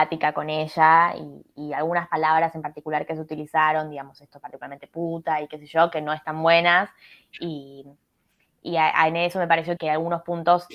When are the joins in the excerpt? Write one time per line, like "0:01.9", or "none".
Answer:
0:09.8